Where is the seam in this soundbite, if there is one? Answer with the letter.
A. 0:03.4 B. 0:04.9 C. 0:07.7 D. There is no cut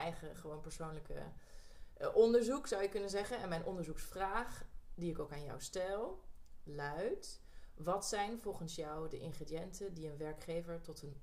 D